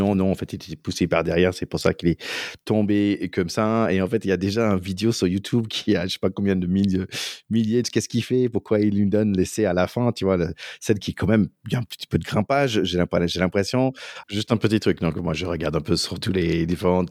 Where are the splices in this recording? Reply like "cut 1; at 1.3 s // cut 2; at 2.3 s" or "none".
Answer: cut 1; at 7.8 s // cut 2; at 14.2 s